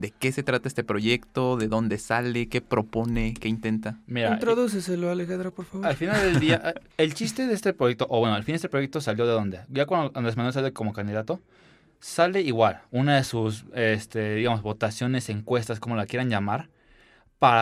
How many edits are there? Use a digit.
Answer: 0